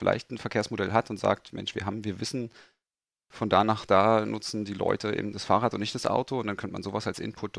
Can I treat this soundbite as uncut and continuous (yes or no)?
yes